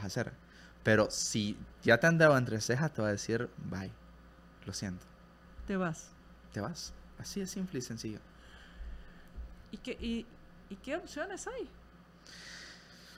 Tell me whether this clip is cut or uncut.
uncut